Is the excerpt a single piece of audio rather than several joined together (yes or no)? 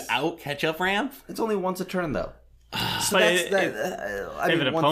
yes